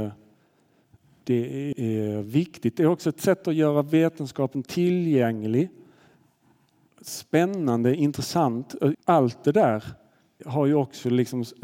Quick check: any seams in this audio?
yes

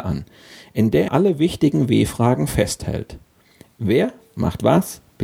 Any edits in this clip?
yes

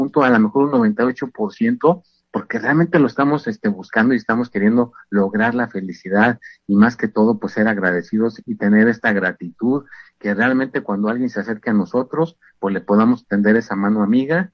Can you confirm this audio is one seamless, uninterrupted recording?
yes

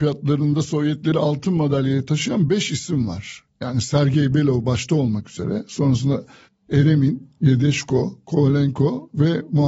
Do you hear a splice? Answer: no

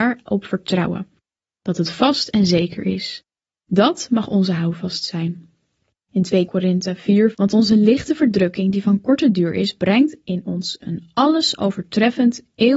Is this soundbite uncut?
no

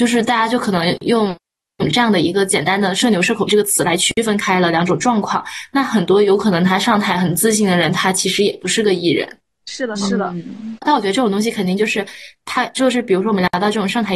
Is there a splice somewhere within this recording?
yes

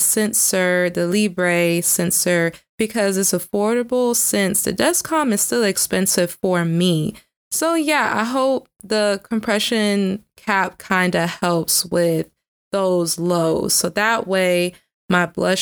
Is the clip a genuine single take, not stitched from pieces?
yes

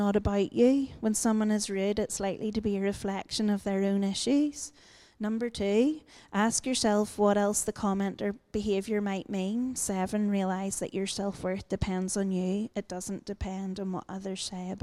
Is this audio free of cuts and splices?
no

